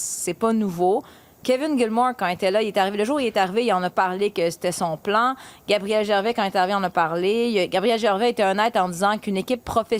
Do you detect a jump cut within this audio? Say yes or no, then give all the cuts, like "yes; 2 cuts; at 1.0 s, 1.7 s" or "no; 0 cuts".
no; 0 cuts